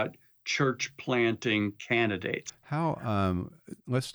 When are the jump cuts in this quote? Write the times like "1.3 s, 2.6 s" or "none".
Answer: 2.5 s